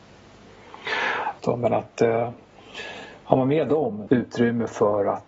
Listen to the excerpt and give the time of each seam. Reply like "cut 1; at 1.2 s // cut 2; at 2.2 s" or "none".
cut 1; at 1.4 s // cut 2; at 4.1 s